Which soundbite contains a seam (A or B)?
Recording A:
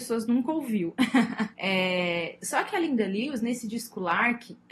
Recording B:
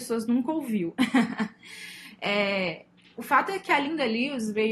A